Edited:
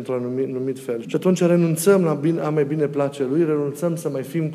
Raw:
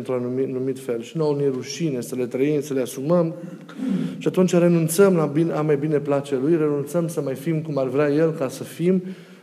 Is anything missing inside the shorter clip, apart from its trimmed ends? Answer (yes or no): yes